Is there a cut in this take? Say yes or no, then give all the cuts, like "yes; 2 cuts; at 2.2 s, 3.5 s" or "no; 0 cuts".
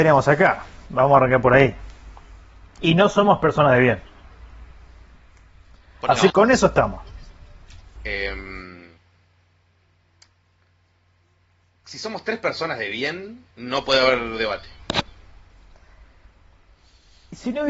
yes; 3 cuts; at 6.3 s, 8.0 s, 13.5 s